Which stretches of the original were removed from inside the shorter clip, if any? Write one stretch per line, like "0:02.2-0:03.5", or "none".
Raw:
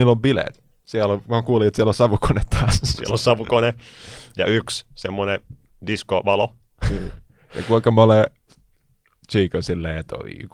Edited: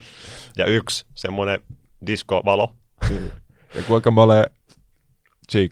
none